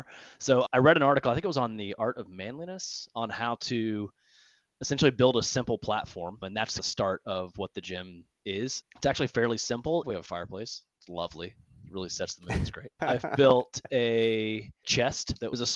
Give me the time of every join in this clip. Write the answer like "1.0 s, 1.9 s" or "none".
8.8 s, 10.0 s